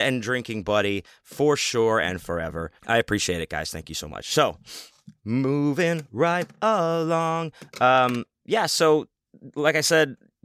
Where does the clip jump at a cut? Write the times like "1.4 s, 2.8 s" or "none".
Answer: 2.8 s